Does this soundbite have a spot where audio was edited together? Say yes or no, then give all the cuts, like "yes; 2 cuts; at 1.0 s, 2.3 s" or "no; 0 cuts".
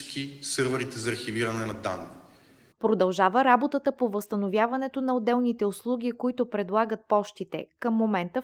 yes; 1 cut; at 2.7 s